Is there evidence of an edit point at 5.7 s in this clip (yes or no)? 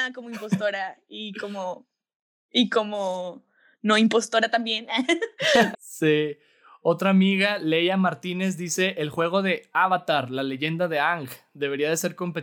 yes